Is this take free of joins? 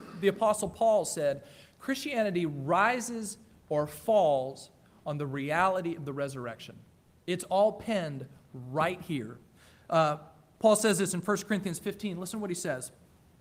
yes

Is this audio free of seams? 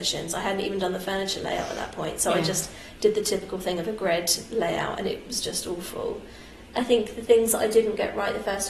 no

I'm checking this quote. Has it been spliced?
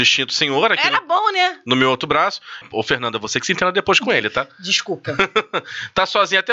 yes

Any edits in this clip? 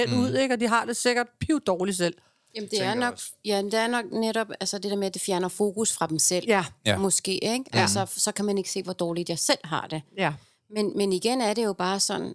no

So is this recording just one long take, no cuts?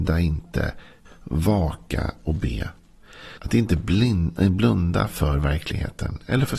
no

